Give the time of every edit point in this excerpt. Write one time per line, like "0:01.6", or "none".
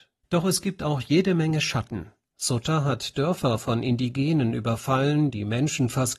none